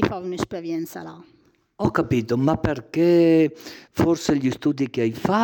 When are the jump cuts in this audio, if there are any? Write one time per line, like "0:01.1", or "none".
none